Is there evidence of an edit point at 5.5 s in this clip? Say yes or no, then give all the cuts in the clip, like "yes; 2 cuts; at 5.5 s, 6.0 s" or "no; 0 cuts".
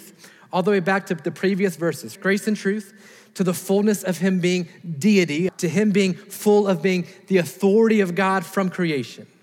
yes; 2 cuts; at 2.2 s, 5.5 s